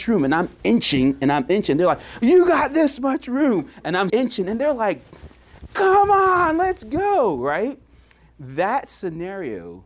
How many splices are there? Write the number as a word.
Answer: one